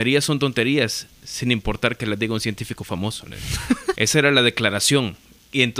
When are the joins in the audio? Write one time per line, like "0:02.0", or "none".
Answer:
0:04.0